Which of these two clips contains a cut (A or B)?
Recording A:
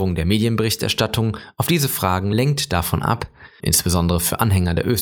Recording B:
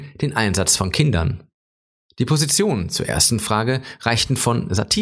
A